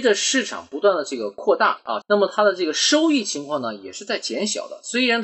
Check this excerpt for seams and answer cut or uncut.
cut